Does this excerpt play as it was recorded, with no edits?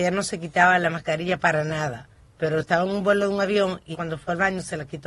no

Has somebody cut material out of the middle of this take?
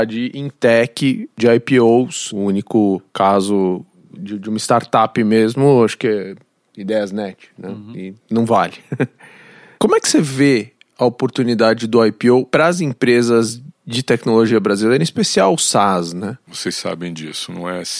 yes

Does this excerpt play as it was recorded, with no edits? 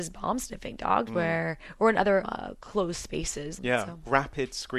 no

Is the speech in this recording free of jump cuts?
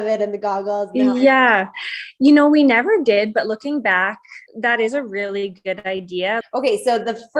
no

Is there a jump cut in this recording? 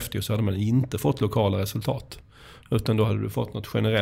no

